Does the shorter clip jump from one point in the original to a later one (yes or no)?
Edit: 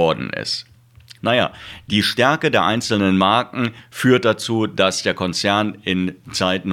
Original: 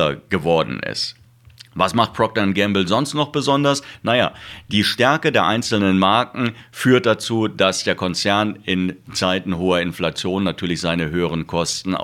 yes